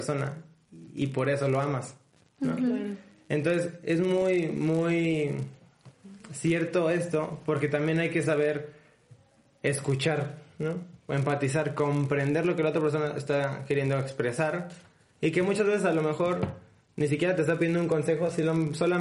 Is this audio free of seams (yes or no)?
yes